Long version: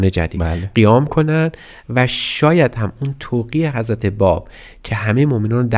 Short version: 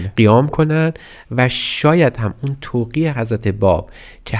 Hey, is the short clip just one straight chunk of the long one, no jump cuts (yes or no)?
yes